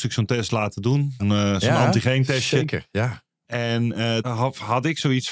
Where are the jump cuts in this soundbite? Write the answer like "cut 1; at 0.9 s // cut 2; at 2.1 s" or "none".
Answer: cut 1; at 1.2 s // cut 2; at 4.2 s

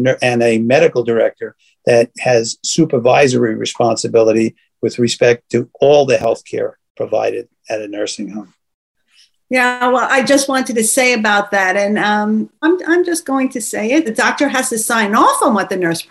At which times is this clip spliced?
cut 1; at 12.6 s // cut 2; at 14.1 s

